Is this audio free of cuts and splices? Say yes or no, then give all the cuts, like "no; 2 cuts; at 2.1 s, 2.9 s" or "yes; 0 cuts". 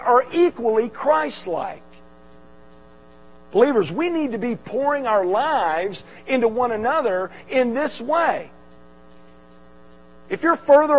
yes; 0 cuts